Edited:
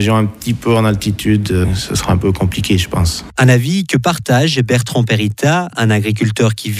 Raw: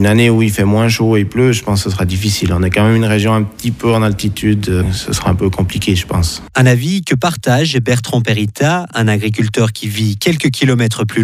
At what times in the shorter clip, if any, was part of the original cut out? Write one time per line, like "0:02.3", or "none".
none